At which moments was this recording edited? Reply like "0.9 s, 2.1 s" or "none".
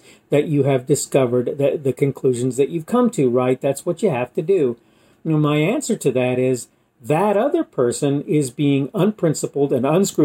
5.1 s